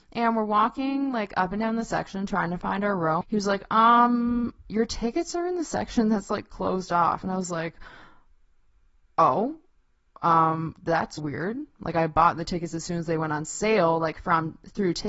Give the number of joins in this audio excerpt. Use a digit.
2